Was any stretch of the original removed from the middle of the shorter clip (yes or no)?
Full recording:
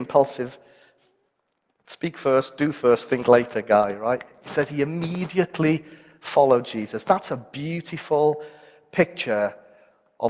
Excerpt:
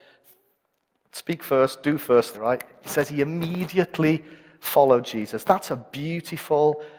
yes